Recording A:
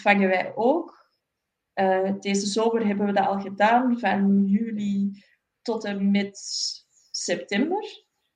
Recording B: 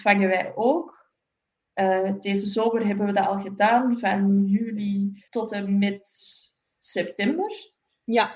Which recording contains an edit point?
B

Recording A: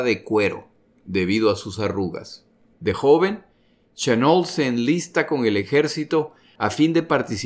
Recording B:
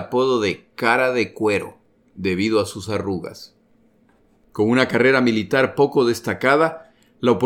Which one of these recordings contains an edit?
A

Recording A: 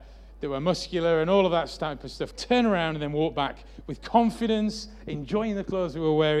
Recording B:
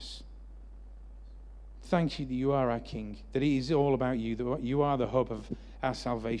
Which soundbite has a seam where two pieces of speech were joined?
A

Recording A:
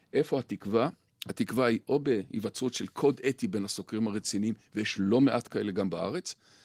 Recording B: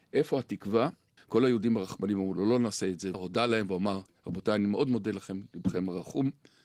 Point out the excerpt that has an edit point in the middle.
B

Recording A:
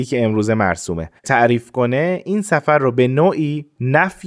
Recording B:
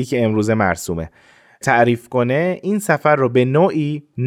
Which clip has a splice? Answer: A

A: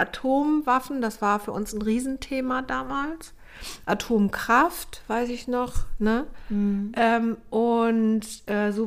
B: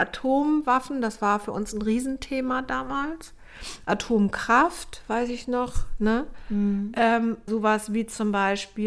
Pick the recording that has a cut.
B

